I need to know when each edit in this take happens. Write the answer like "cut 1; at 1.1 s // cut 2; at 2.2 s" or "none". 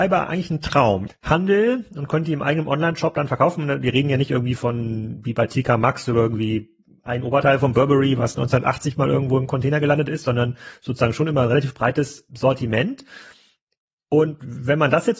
cut 1; at 1.1 s // cut 2; at 12.3 s